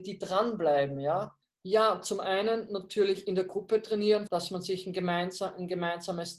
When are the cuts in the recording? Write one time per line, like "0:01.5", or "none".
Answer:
0:01.4
0:04.3